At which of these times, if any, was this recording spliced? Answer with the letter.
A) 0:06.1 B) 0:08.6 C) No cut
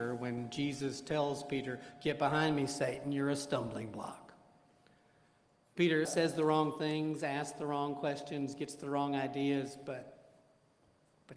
A